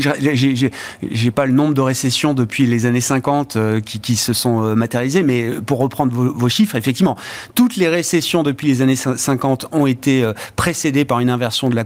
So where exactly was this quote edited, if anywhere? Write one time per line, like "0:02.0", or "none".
none